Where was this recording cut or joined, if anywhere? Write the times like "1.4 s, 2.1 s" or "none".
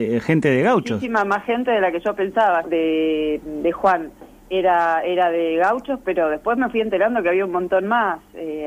2.6 s